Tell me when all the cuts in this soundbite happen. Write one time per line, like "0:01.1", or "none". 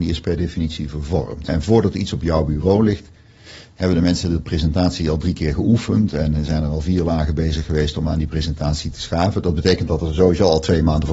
0:01.5